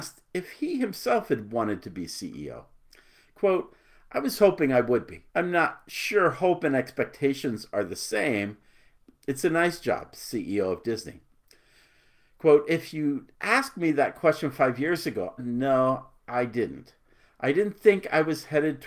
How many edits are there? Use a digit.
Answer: 3